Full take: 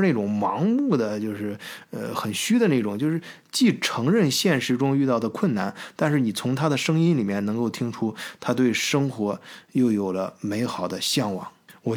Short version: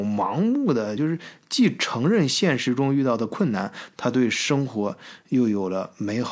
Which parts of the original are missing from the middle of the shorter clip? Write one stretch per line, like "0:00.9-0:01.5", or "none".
0:01.2-0:03.0
0:05.9-0:08.4